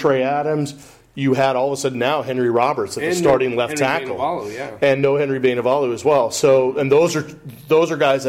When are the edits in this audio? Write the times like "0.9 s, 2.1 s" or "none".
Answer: none